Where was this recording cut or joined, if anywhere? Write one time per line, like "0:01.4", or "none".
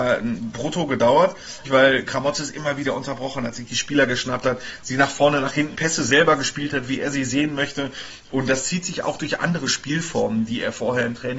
0:01.6
0:05.7